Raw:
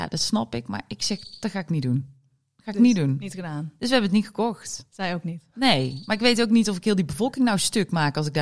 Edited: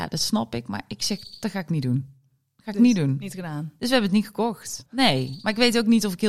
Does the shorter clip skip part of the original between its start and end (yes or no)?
yes